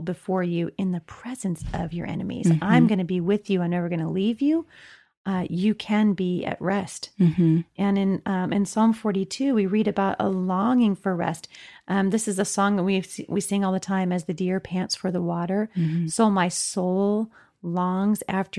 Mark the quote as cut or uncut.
uncut